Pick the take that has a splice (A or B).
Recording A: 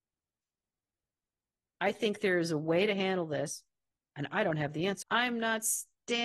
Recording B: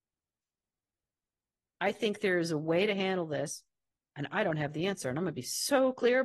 A